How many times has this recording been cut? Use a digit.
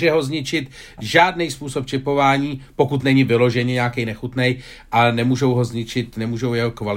0